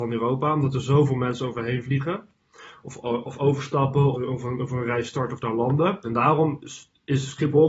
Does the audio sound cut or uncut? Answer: cut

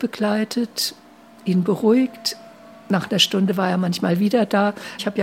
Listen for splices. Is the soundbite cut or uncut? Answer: uncut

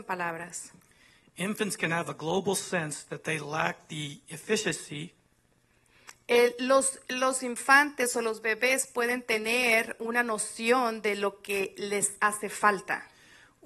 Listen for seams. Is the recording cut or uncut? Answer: uncut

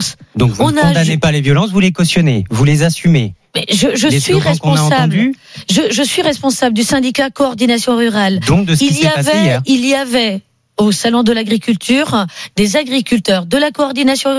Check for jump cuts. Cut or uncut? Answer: uncut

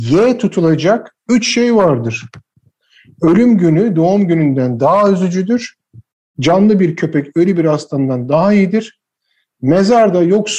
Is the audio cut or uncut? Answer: uncut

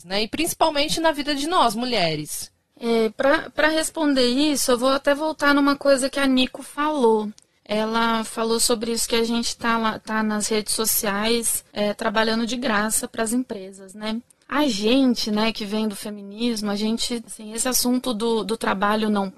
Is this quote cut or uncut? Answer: uncut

